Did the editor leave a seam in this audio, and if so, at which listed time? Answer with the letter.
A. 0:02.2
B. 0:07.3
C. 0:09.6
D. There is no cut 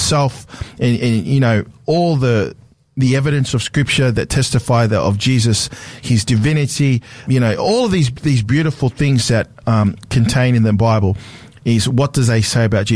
B